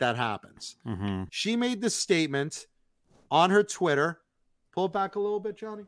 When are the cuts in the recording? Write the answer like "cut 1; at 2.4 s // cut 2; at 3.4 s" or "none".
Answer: cut 1; at 1.3 s